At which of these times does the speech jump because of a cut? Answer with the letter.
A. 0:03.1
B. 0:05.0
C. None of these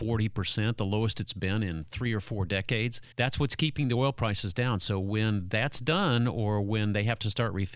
A